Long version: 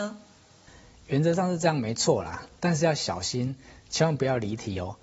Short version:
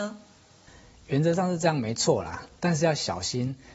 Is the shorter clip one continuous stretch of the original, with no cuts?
yes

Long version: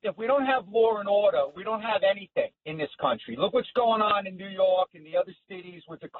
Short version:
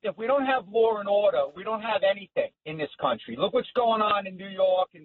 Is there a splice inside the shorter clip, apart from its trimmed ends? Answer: no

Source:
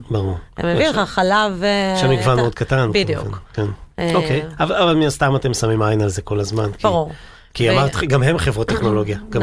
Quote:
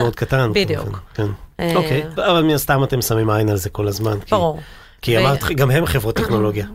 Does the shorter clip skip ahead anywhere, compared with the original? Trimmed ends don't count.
yes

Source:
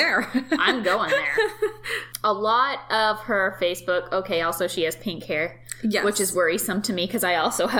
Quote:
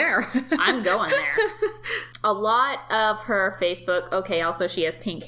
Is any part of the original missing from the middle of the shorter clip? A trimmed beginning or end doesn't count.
no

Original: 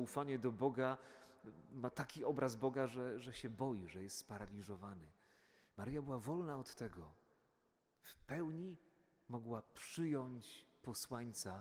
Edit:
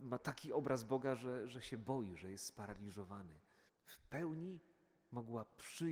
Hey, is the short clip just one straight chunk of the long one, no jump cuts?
no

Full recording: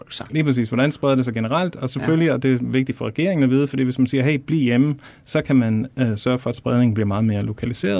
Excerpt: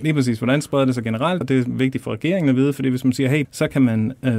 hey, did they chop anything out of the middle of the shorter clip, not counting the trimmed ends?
yes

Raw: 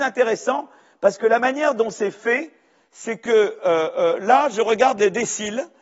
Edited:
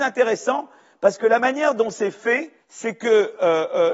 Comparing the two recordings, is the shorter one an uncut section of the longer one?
no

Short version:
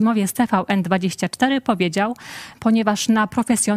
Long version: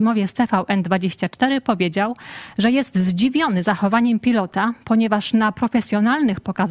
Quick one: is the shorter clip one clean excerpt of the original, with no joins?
no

